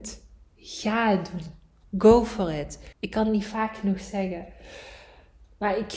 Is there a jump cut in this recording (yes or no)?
yes